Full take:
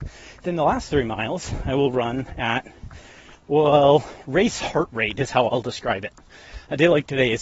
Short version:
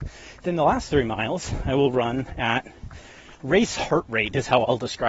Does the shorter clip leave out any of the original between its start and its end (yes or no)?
yes